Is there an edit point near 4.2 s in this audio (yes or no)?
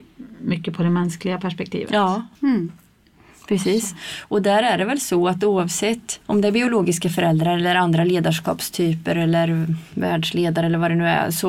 no